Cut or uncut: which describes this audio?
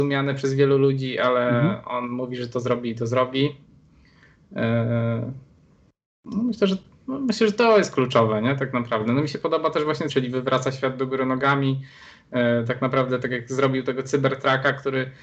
cut